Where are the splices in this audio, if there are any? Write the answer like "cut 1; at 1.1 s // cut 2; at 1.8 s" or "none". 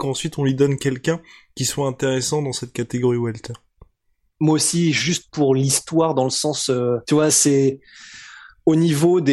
cut 1; at 4.3 s // cut 2; at 7.0 s